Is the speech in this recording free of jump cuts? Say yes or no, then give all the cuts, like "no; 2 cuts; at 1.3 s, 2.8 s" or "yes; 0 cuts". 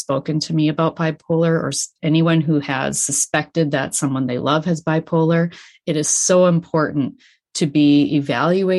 yes; 0 cuts